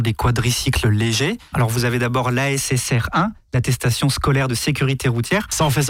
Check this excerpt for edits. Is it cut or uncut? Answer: cut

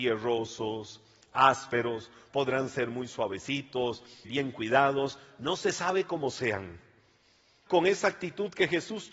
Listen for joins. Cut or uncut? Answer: cut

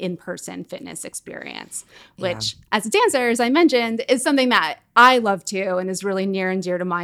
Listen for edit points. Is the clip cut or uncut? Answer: uncut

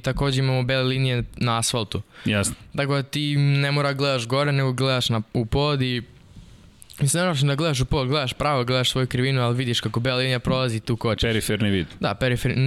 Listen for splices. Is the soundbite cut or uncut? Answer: uncut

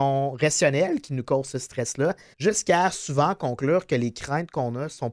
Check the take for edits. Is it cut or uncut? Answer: cut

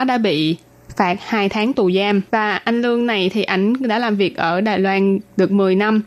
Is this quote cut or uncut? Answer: cut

